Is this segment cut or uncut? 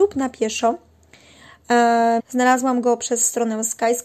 cut